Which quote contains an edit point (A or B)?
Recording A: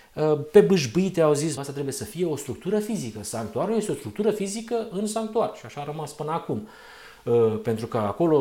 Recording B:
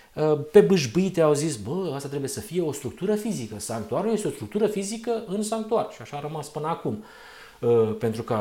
A